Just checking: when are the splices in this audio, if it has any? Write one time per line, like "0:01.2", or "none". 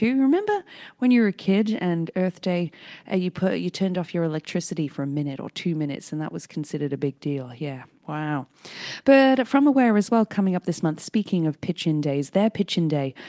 none